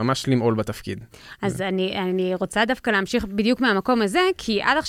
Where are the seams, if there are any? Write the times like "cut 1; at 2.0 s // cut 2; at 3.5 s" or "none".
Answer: none